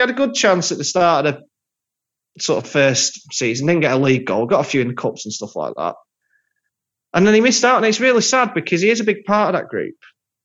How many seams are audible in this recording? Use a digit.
0